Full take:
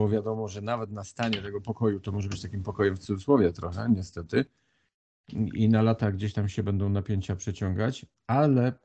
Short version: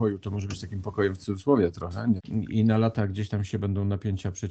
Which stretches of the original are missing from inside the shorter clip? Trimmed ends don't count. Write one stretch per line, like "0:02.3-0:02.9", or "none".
0:04.0-0:05.2